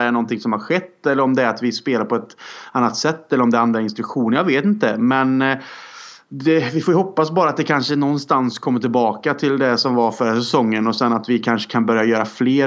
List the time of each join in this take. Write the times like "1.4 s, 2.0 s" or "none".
none